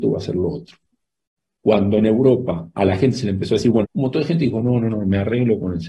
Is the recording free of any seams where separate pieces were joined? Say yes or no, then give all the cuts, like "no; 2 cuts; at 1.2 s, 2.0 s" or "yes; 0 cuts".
no; 2 cuts; at 1.6 s, 3.8 s